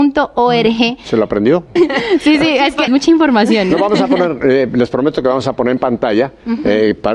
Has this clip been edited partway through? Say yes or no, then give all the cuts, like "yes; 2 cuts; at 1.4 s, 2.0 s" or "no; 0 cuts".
yes; 2 cuts; at 1.8 s, 2.9 s